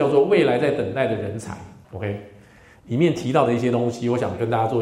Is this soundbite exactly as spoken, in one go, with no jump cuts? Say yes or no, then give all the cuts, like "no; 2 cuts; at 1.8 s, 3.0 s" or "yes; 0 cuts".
no; 1 cut; at 1.8 s